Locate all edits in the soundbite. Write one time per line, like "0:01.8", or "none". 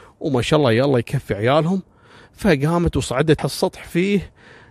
0:03.4

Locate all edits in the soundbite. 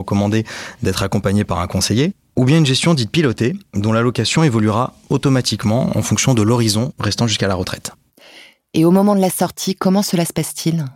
none

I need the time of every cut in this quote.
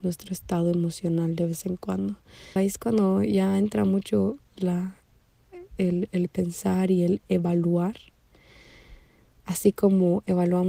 0:02.6

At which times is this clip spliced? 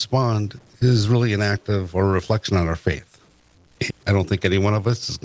0:03.9

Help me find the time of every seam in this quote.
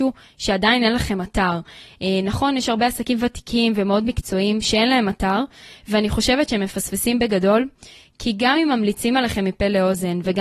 none

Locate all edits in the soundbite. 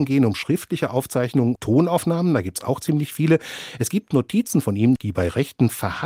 0:01.6
0:05.0

